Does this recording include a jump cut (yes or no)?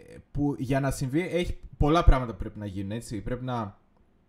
no